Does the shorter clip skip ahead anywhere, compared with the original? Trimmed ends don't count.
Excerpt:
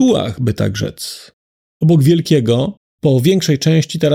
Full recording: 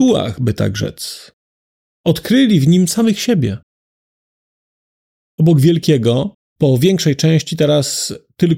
yes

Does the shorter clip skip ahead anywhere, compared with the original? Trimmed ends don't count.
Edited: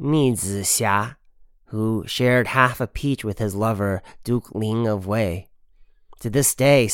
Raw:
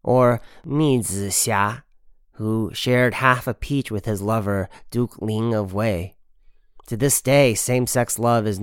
no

